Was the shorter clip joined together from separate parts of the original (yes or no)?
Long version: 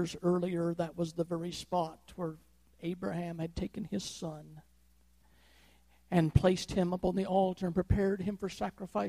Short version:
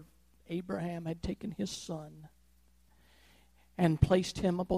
no